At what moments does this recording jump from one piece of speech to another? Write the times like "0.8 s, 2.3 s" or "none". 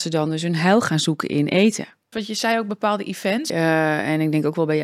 2.1 s, 3.5 s